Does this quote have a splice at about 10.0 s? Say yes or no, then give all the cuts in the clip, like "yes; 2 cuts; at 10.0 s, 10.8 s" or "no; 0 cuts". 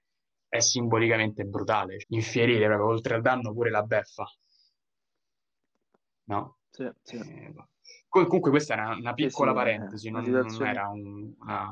no; 1 cut; at 2.0 s